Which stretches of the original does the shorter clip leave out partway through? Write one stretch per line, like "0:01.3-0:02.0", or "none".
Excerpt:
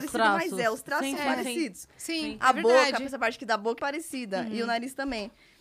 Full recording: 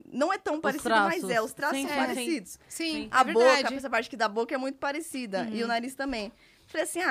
0:04.5-0:04.8